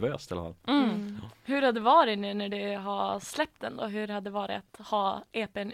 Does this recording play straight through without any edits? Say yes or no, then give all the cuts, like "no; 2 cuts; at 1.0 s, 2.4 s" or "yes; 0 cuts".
yes; 0 cuts